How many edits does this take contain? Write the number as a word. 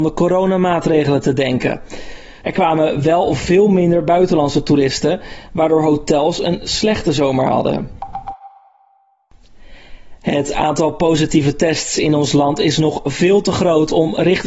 one